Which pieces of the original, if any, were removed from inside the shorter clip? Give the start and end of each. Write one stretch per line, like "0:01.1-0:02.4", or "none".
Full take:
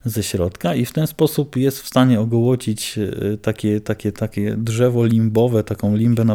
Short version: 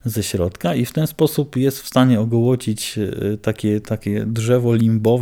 0:03.8-0:04.1